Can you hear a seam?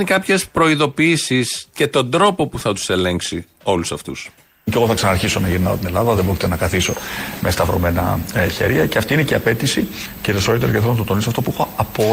no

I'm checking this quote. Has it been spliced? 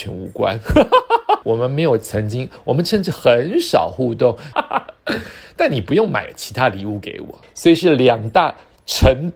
yes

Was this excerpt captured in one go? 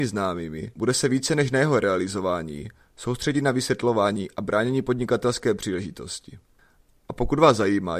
yes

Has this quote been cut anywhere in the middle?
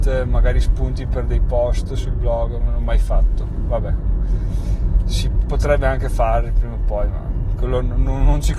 no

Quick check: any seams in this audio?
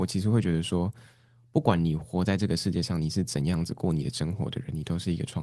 no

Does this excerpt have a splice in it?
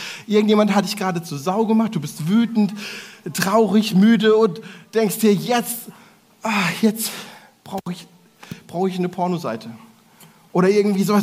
no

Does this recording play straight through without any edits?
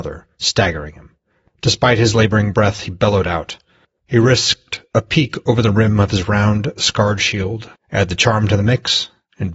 no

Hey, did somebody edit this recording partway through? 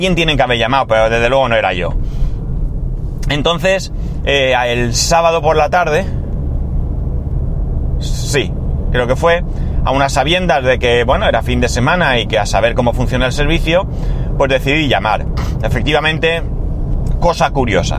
no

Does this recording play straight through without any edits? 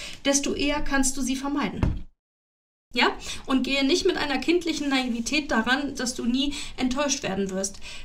no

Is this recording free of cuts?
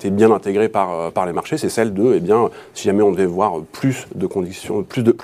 yes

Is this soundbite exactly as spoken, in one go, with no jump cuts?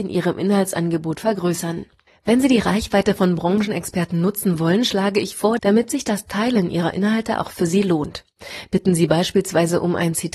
no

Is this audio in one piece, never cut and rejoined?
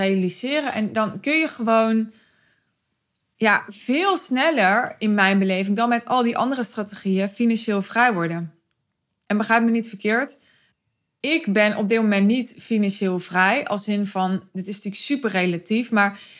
yes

